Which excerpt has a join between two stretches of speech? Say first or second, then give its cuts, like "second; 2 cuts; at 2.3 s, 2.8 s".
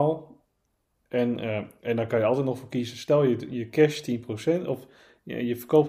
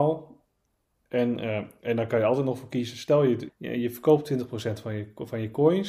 second; 1 cut; at 3.5 s